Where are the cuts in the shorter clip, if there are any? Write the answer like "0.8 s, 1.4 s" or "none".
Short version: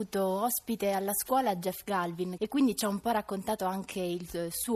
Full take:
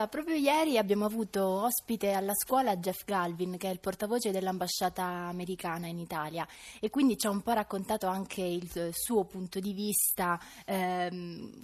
2.4 s

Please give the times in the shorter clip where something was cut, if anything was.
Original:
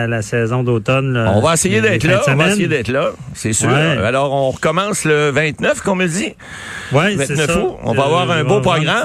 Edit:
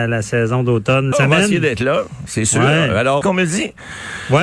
1.1 s, 3.2 s

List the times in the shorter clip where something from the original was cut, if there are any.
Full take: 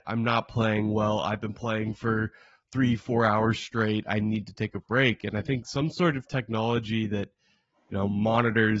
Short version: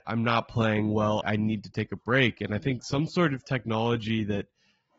1.2 s

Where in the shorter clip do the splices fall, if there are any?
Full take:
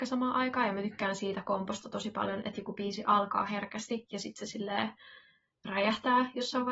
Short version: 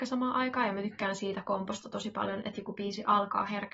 none

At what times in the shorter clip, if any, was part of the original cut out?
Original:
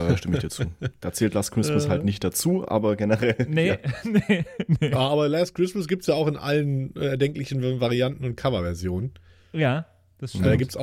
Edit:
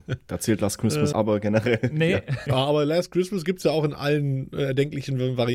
1.1 s, 2.5 s

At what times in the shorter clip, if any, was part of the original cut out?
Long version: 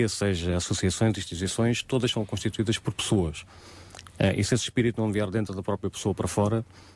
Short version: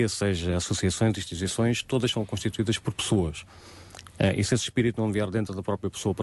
none

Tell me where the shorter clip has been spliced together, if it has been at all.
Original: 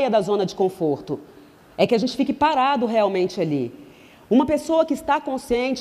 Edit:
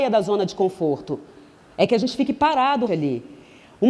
2.9 s

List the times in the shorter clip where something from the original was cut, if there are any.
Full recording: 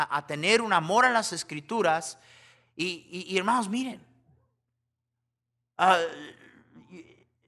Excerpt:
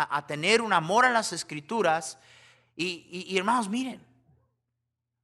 none

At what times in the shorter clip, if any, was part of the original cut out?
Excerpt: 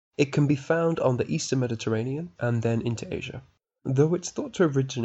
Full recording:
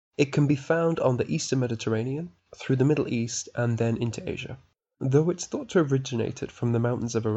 2.4 s

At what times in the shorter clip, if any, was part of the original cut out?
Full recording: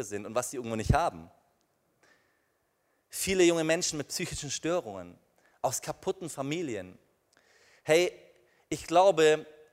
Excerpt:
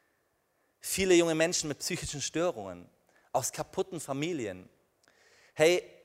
none

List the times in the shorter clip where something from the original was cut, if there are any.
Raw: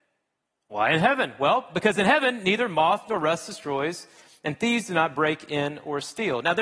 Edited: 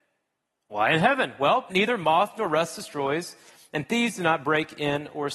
1.7 s

